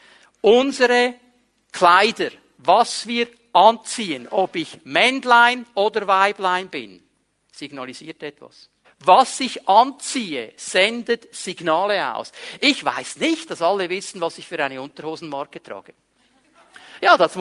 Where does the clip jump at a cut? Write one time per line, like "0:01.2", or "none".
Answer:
0:08.8
0:13.5